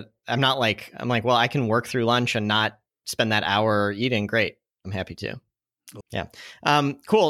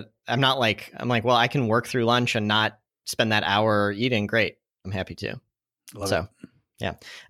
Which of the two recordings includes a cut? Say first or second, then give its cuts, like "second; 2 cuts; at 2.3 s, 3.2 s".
first; 1 cut; at 6.0 s